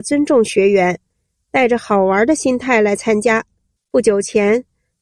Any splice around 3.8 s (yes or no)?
yes